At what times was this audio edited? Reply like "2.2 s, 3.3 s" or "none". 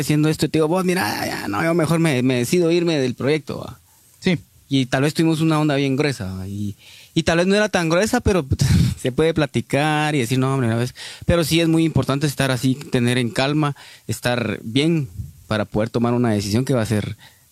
none